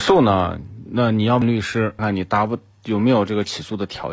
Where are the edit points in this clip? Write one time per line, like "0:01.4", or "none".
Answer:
0:02.0

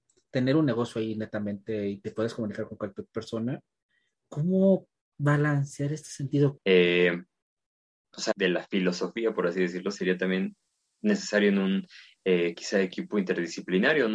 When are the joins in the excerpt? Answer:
0:06.6
0:08.3

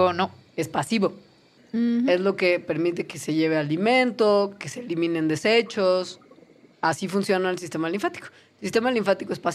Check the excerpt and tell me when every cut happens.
0:01.6
0:06.7

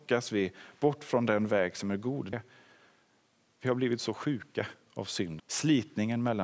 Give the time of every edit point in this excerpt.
0:02.3
0:05.4

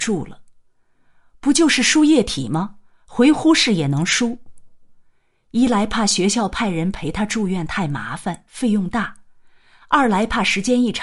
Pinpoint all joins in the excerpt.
none

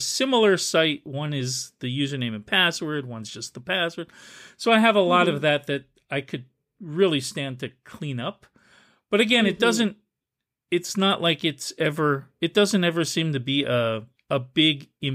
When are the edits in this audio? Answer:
0:14.2

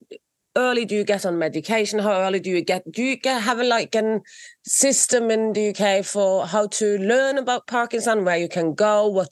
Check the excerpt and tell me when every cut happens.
none

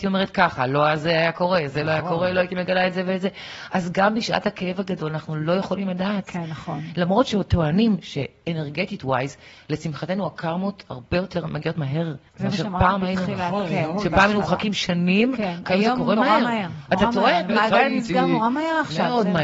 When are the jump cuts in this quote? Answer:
0:12.3
0:17.5

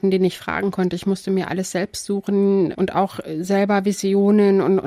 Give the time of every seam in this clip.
0:02.7

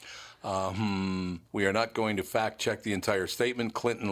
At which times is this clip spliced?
0:01.5

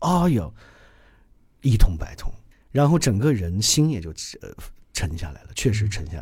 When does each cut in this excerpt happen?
0:02.5

